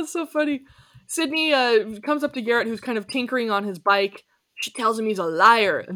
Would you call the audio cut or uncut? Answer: uncut